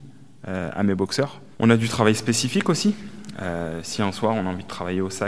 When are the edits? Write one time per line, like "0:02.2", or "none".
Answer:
0:01.5